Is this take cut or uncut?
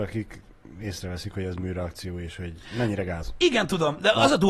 uncut